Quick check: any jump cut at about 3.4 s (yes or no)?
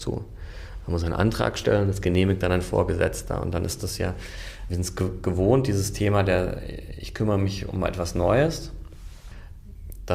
no